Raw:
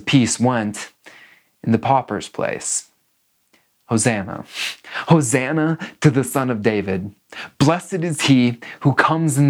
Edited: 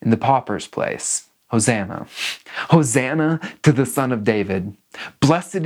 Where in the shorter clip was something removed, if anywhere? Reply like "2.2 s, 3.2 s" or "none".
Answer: 1.4 s